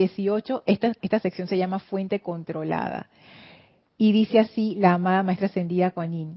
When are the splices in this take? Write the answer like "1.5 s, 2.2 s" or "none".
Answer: 1.0 s